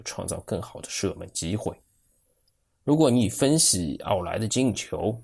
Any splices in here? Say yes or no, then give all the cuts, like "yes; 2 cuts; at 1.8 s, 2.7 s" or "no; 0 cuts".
no; 0 cuts